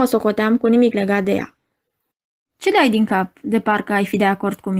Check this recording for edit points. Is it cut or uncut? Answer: uncut